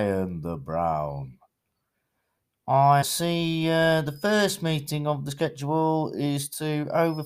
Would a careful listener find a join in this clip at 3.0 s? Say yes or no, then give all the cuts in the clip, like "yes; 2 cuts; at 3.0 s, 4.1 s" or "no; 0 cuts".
yes; 1 cut; at 3.0 s